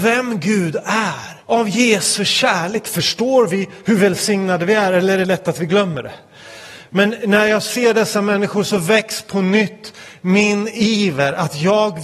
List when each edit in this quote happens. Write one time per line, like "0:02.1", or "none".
0:01.4